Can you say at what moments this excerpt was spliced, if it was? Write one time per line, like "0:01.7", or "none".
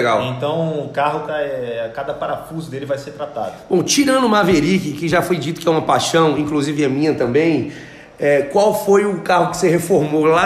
0:01.3